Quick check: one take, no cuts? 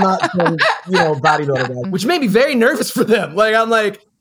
no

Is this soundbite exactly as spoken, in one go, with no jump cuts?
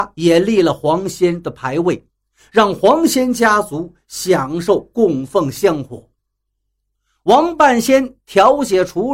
yes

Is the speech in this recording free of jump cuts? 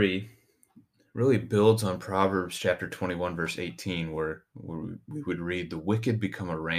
yes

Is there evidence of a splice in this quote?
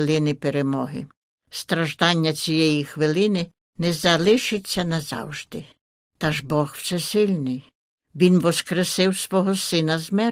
no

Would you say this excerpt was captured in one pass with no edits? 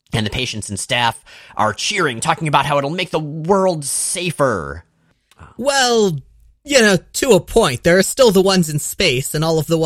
yes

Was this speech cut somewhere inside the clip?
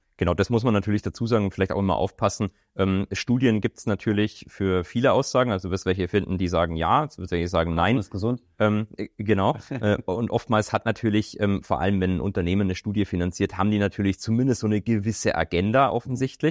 no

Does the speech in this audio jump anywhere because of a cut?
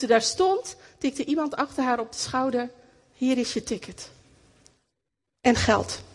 no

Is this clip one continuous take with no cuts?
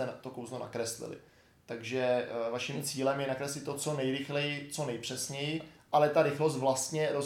yes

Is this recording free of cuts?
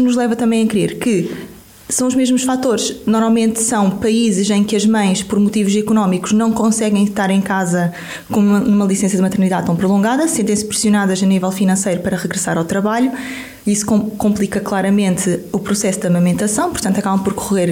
yes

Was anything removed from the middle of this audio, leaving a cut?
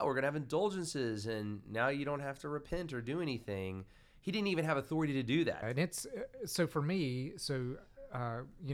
yes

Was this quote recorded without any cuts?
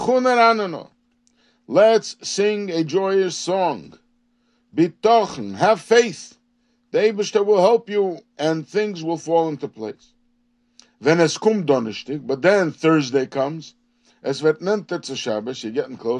yes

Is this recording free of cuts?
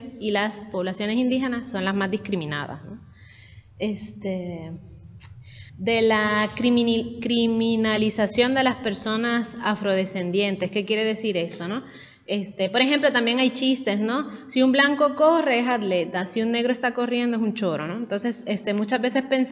no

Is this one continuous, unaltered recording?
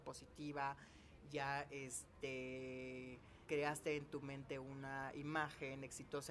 no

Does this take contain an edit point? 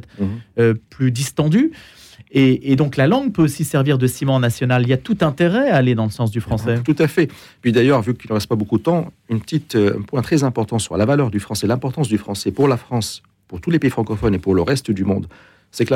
no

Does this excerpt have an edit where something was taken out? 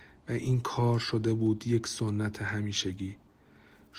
no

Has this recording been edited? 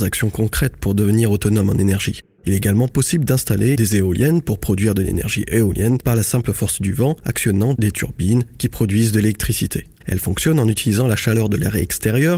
yes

